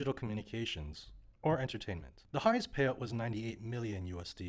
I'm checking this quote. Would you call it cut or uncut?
uncut